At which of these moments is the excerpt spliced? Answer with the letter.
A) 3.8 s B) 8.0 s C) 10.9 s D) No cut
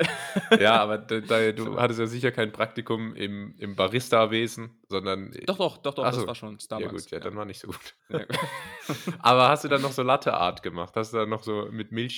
B